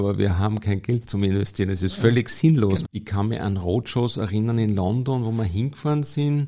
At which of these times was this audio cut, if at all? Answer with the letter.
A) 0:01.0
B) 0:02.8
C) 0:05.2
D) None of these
B